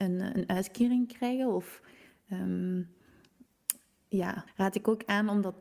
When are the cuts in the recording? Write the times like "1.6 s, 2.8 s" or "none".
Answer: 4.5 s